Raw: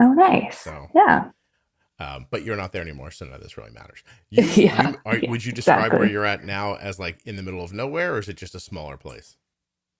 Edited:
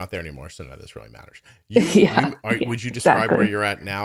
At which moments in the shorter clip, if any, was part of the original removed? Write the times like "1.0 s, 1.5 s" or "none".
none